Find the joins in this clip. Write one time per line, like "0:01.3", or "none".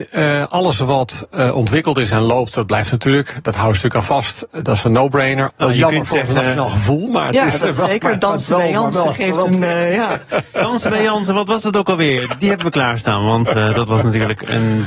0:05.5